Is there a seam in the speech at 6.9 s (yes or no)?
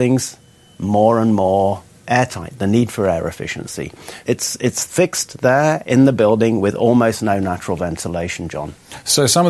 no